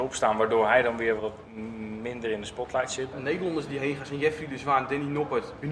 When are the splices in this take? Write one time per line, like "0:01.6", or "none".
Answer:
0:01.2
0:03.1